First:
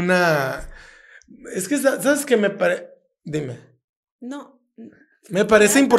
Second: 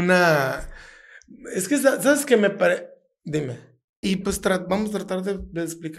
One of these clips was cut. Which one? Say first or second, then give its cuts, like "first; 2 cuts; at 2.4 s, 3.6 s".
second; 1 cut; at 4.0 s